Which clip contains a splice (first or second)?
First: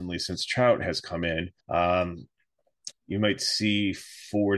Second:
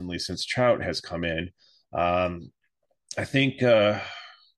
first